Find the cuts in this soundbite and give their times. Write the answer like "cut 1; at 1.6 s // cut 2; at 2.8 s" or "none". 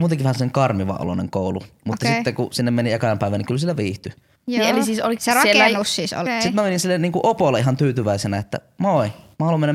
cut 1; at 5.2 s // cut 2; at 6.3 s